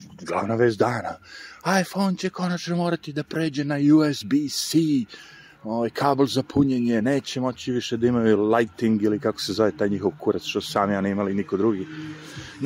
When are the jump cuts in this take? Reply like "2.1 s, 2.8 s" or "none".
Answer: none